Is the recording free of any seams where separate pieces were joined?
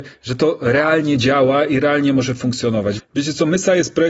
no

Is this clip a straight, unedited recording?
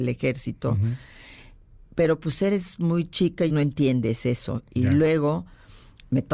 no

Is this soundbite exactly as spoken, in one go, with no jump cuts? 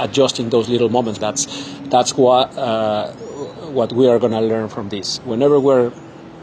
no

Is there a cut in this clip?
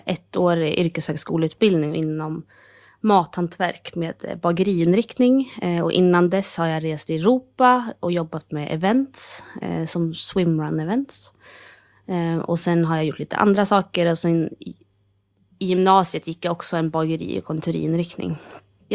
no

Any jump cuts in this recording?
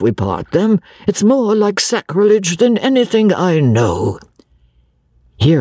no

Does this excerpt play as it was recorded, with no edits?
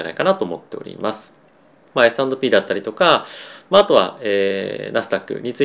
no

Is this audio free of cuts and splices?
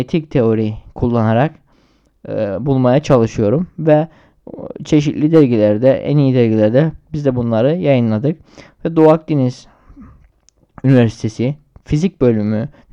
yes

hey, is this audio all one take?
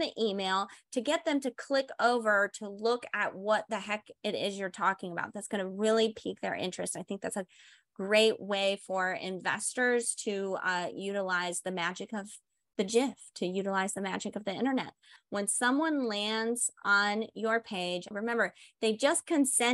no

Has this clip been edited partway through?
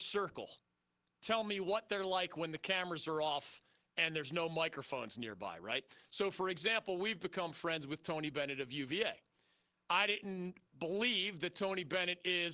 no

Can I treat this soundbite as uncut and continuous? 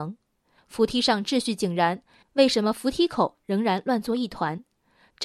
yes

